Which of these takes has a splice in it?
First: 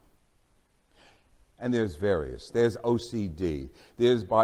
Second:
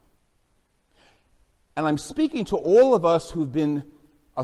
first; 1 cut; at 1.5 s

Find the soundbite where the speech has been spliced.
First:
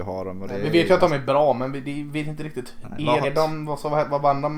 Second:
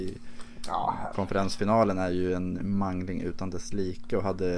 first; 1 cut; at 3.2 s

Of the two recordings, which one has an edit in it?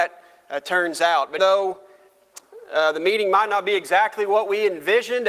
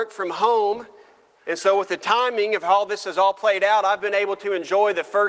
first; 1 cut; at 1.4 s

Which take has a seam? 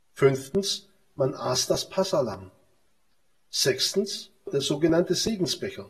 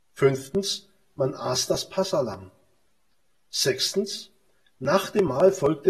first; 1 cut; at 4.5 s

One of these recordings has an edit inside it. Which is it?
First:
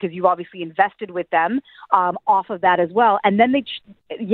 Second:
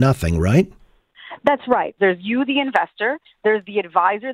second; 1 cut; at 2.0 s

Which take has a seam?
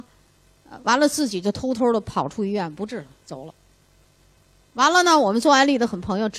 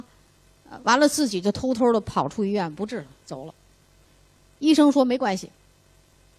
second; 1 cut; at 4.1 s

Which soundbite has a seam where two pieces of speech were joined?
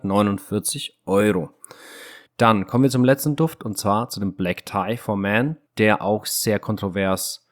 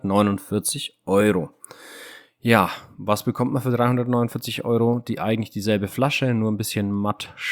first; 2 cuts; at 2.3 s, 5.7 s

